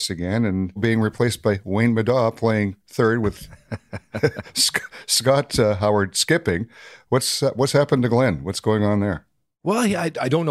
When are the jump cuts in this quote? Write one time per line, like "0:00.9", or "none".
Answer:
none